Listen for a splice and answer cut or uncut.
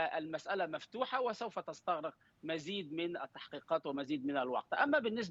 uncut